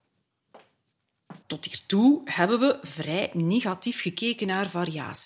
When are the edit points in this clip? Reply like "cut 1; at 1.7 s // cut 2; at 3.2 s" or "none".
cut 1; at 1.4 s